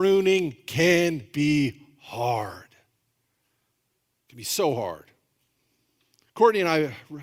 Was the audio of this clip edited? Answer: no; 0 cuts

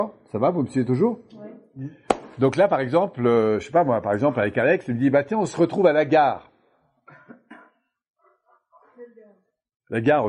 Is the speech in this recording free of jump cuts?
yes; 0 cuts

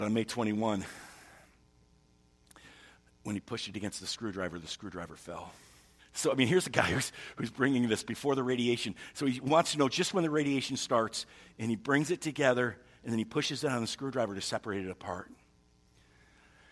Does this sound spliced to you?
yes; 1 cut; at 6.0 s

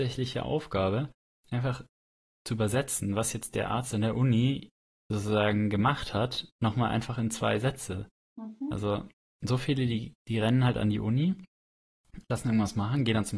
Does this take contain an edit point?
no; 0 cuts

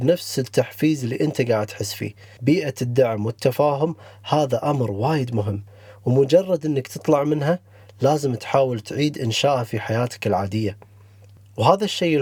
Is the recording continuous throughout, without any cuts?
yes; 0 cuts

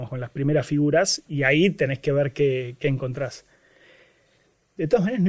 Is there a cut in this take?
no; 0 cuts

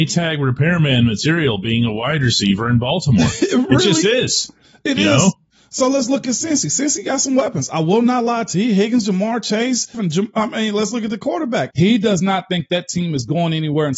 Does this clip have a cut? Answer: yes; 2 cuts; at 9.9 s, 11.7 s

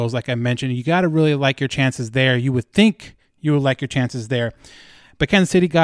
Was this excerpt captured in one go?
yes; 0 cuts

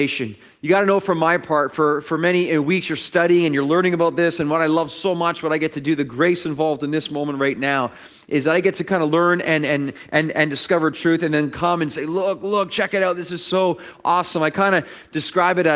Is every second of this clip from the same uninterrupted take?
yes; 0 cuts

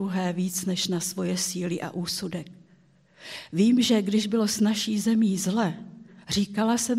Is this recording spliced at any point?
no; 0 cuts

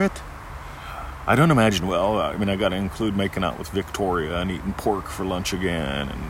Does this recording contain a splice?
no; 0 cuts

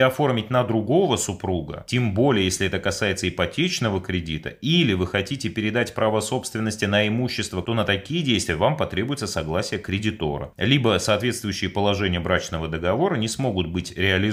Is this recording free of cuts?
no; 1 cut; at 7.6 s

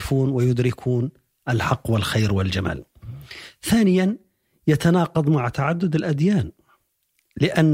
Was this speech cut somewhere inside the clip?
no; 0 cuts

